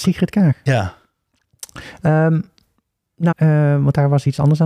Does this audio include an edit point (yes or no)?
yes